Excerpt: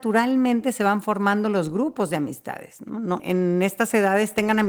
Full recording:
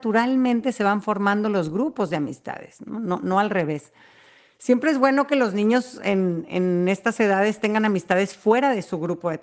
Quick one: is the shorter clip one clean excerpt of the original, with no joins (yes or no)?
no